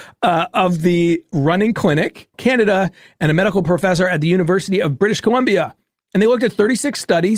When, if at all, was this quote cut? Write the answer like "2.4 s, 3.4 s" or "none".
2.3 s